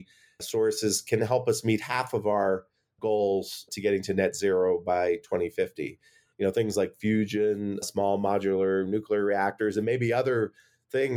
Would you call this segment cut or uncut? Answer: cut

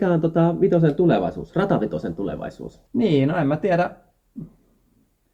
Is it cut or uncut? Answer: cut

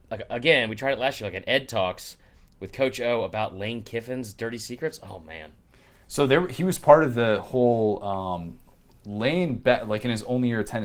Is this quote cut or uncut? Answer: uncut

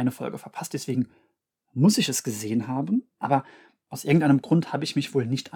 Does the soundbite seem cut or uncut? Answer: uncut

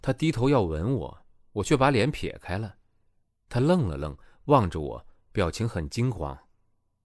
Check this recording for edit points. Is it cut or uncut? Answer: uncut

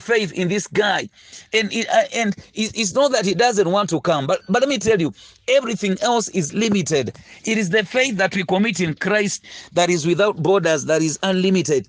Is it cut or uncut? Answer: uncut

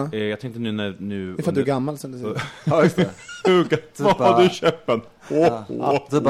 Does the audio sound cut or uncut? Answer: uncut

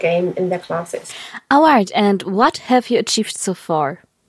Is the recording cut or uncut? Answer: uncut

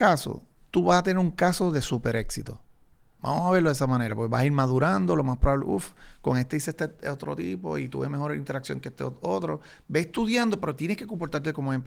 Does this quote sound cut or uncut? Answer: uncut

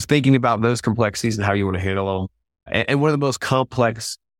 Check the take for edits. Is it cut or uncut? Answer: uncut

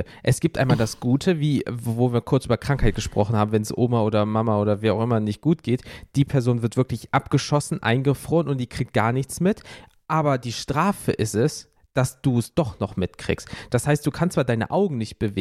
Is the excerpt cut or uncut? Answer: uncut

